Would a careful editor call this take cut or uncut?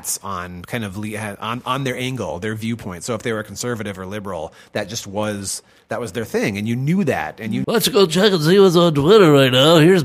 cut